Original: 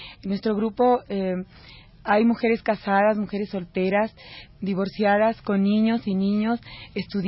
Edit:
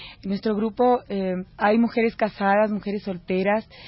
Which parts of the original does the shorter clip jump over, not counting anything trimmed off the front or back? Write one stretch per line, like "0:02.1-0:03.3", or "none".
0:01.5-0:01.9